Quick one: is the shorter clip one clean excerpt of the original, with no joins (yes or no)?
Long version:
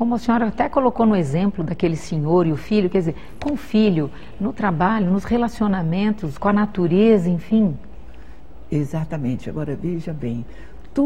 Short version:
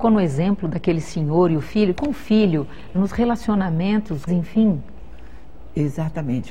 no